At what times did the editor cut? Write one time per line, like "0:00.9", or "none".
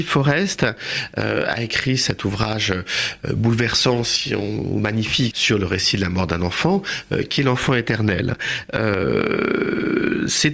0:05.3